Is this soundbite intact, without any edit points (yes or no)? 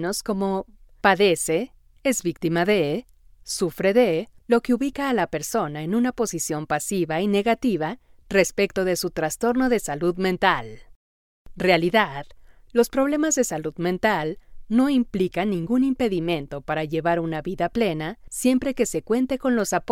yes